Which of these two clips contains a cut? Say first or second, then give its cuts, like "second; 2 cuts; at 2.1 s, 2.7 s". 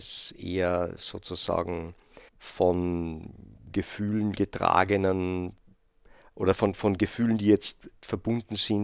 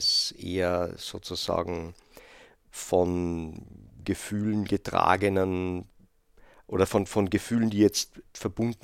first; 1 cut; at 2.3 s